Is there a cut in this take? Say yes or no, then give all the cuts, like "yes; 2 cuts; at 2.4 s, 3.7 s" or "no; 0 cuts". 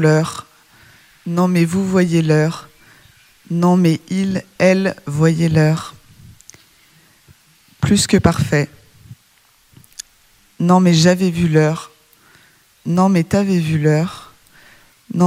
no; 0 cuts